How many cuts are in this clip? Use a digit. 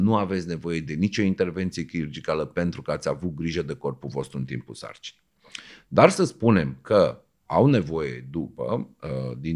0